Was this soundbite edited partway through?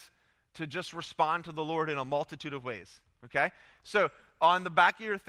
no; 0 cuts

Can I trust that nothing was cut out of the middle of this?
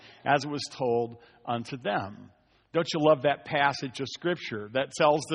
yes; 0 cuts

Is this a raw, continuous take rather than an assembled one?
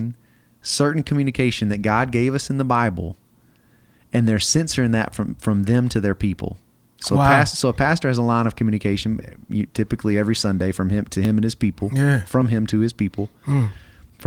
yes; 0 cuts

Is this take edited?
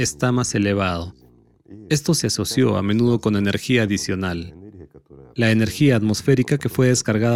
no; 0 cuts

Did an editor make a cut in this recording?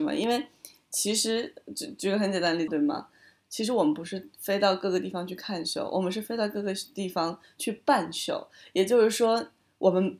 yes; 1 cut; at 2.7 s

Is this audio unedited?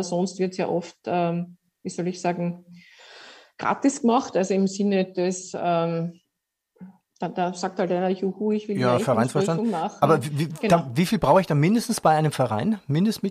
yes; 0 cuts

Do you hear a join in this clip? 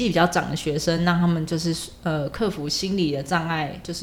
no; 0 cuts

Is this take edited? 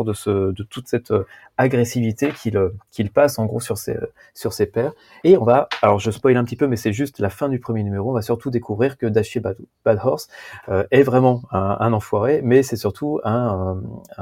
yes; 1 cut; at 5.2 s

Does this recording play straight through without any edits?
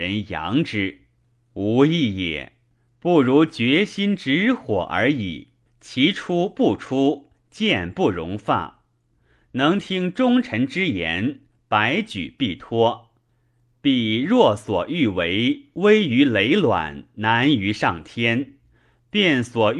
no; 1 cut; at 5.7 s

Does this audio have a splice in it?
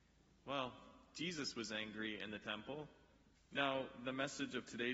yes; 1 cut; at 3.3 s

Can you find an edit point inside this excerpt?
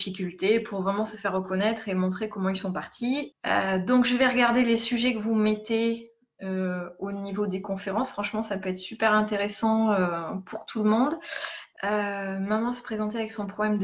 yes; 2 cuts; at 3.3 s, 11.8 s

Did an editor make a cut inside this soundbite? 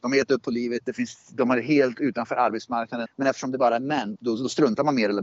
yes; 2 cuts; at 3.1 s, 4.2 s

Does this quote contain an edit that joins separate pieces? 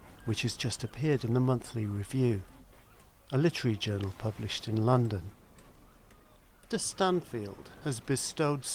yes; 1 cut; at 6.7 s

